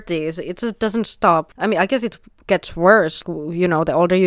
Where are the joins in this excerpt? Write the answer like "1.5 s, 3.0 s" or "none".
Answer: none